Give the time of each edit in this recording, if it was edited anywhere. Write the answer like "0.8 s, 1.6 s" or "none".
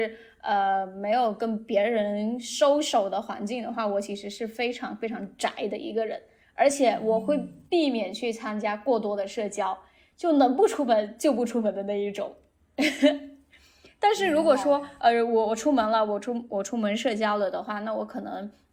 none